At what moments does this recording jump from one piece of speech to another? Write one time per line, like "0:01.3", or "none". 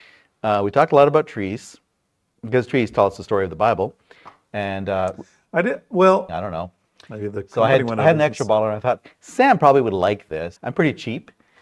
0:06.3
0:10.6